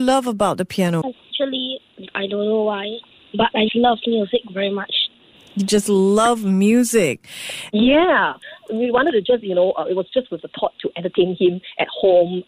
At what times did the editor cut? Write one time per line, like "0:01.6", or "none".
0:03.7
0:07.7